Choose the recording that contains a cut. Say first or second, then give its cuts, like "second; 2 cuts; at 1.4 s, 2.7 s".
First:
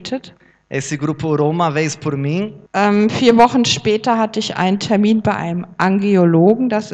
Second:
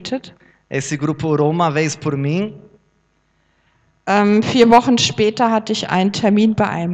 first; 1 cut; at 2.7 s